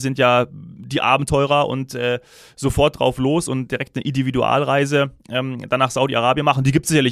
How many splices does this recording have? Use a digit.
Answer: 0